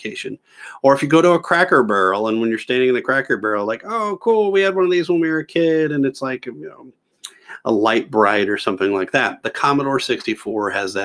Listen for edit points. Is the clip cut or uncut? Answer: uncut